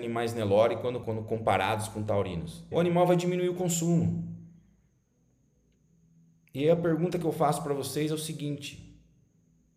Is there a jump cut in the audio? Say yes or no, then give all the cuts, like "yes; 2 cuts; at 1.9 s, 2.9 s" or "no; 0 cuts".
yes; 2 cuts; at 1.0 s, 2.7 s